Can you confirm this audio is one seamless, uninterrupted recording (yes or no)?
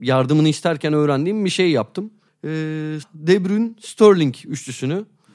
no